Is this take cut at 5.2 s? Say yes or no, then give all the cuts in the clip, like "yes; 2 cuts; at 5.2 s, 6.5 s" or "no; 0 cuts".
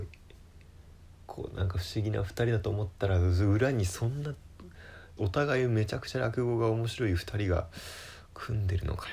yes; 1 cut; at 5.2 s